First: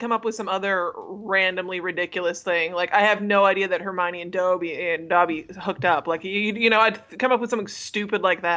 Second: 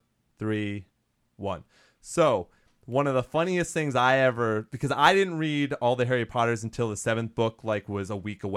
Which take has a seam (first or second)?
second